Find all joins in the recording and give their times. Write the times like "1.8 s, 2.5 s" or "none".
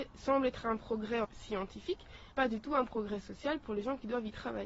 1.2 s, 2.3 s